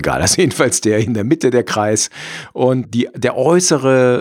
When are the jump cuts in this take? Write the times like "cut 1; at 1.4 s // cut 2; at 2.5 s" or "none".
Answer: cut 1; at 2.8 s

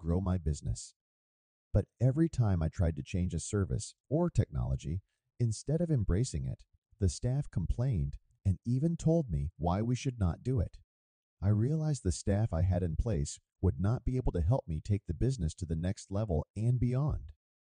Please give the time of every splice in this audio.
cut 1; at 4.0 s

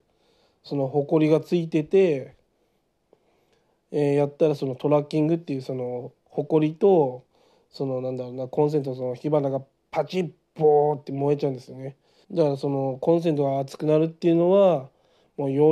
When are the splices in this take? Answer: cut 1; at 12.2 s

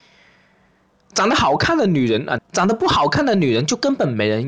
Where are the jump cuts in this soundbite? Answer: cut 1; at 2.4 s

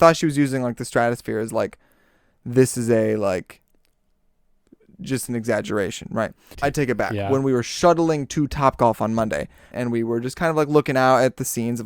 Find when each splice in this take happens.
cut 1; at 6.5 s // cut 2; at 9.7 s

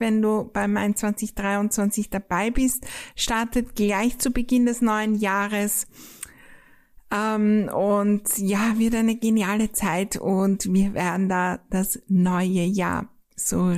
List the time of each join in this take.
none

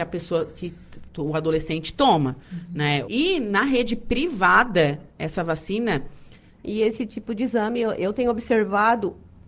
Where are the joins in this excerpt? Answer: cut 1; at 3.0 s // cut 2; at 6.5 s

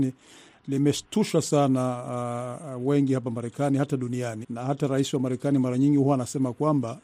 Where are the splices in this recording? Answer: cut 1; at 4.4 s

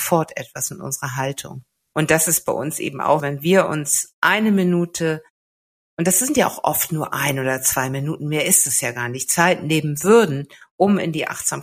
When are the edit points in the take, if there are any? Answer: cut 1; at 1.9 s // cut 2; at 3.2 s

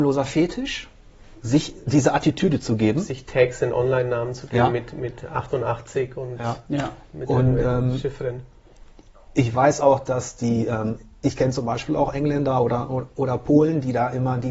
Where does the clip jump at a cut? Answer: none

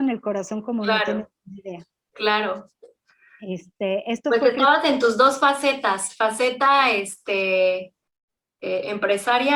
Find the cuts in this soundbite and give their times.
none

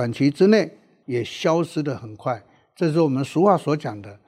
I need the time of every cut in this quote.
cut 1; at 1.0 s

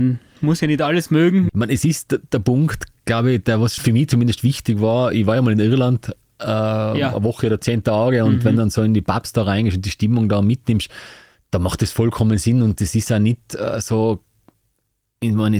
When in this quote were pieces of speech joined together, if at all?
cut 1; at 1.5 s // cut 2; at 3.8 s

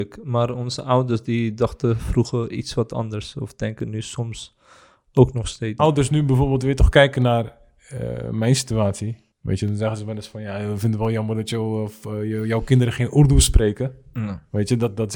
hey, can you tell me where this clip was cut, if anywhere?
cut 1; at 5.8 s // cut 2; at 9.3 s

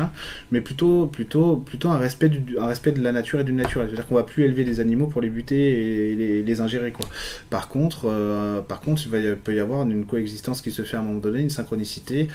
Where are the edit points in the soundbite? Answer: none

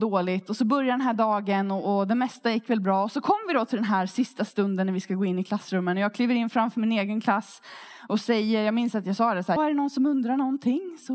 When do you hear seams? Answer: cut 1; at 9.6 s

